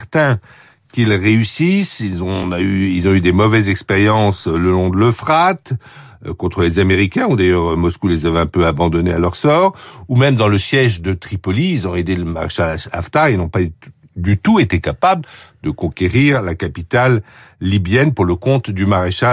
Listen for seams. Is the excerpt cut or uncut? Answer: uncut